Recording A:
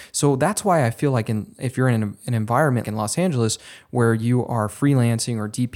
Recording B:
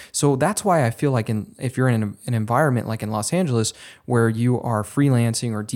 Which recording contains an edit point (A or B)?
A